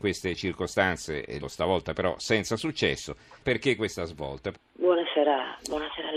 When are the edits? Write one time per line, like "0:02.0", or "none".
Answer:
0:01.4
0:03.4
0:04.5